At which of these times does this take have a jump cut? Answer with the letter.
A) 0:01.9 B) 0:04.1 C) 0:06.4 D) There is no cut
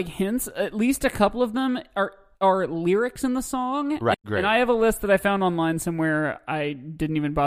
B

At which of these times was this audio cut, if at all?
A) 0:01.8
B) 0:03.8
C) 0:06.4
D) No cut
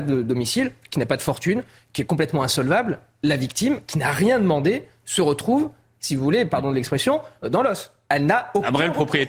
D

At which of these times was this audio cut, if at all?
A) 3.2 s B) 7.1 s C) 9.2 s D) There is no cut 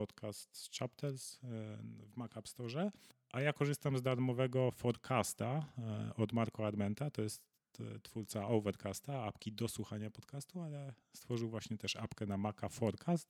D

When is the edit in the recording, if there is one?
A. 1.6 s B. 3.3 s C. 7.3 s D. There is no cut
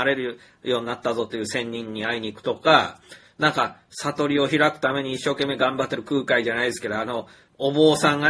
D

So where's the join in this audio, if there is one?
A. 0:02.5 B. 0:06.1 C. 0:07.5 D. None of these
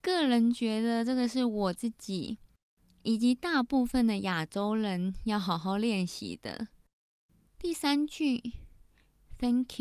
C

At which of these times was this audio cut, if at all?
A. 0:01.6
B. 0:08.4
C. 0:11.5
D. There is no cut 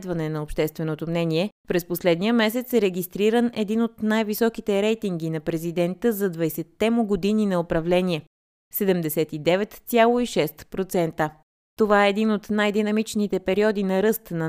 A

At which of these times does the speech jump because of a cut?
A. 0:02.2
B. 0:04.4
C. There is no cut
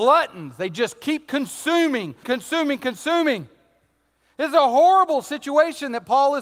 A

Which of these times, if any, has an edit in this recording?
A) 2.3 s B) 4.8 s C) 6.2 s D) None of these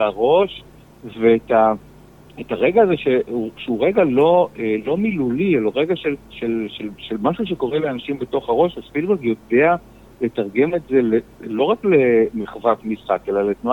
C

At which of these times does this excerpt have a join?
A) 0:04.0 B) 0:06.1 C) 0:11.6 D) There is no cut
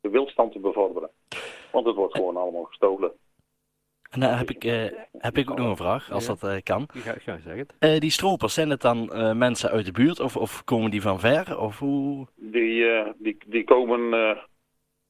D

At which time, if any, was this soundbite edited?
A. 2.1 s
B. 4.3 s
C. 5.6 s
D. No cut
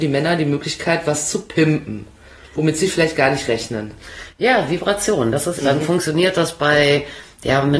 C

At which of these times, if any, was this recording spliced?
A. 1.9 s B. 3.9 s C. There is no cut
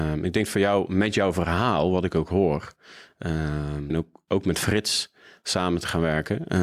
B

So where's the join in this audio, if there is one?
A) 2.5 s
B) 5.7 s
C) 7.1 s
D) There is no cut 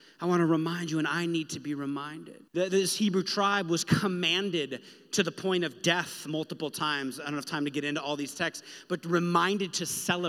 A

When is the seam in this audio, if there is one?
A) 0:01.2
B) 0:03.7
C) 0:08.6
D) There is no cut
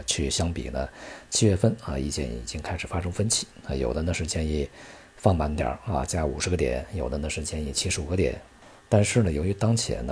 D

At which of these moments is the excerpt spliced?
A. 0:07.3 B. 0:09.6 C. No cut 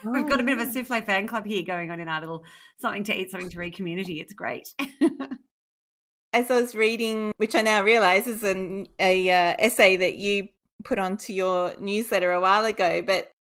C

